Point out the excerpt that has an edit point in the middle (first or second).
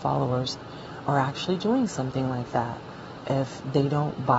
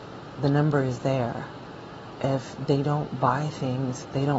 first